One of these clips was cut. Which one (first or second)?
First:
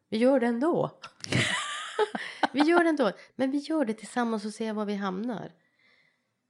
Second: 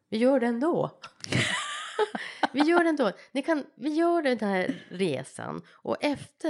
first